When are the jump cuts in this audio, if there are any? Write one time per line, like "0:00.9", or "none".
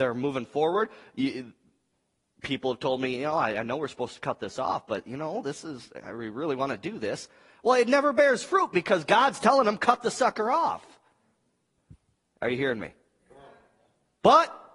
none